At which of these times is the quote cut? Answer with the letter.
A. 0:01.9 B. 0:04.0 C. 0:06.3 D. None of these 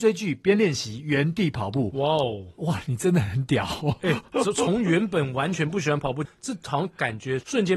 C